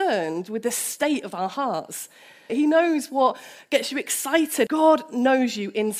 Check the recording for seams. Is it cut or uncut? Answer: cut